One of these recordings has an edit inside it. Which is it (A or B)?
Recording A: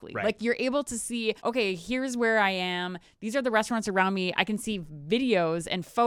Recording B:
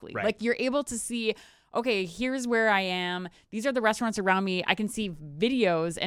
A